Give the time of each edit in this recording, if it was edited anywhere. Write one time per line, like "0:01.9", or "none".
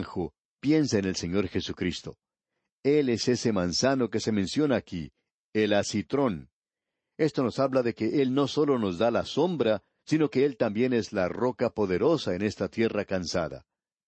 none

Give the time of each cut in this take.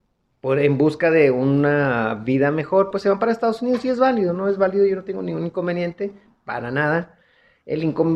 none

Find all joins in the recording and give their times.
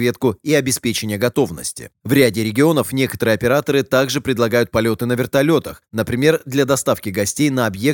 none

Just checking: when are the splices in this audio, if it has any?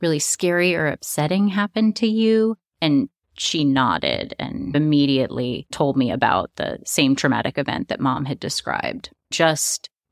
none

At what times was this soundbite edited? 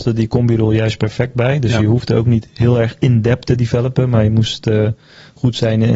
none

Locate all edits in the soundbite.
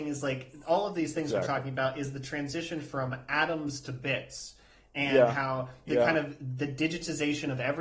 none

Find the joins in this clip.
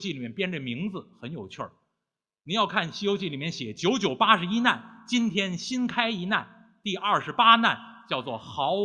none

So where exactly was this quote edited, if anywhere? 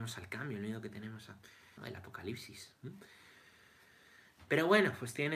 0:01.8

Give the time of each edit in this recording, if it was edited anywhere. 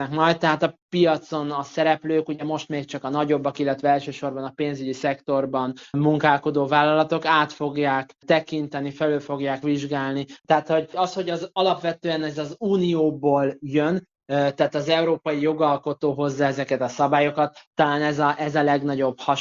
0:10.4

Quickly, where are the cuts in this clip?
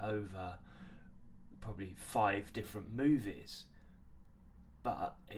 none

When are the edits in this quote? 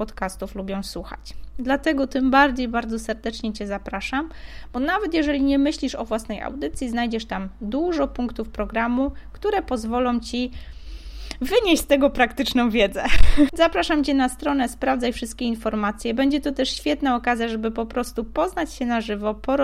0:13.5

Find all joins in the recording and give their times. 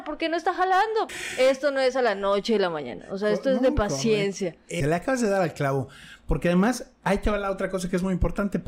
0:01.1
0:04.8

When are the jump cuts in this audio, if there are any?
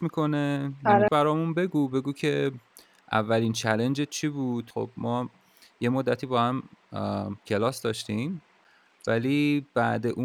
0:01.1

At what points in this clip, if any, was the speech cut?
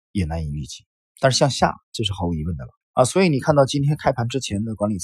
0:01.1
0:02.8

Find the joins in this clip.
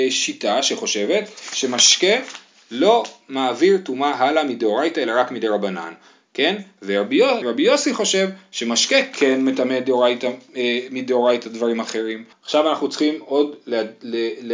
0:07.4
0:12.3

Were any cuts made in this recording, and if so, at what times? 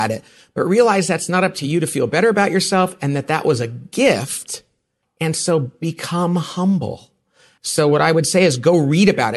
0:05.0
0:07.6

